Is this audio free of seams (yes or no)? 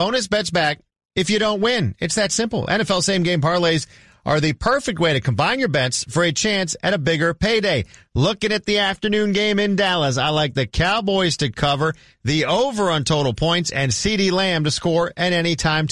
yes